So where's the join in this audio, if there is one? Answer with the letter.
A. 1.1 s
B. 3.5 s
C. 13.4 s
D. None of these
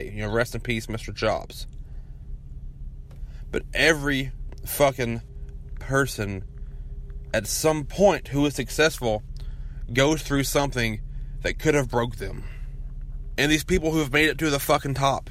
C